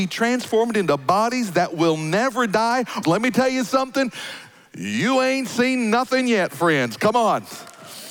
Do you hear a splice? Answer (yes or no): yes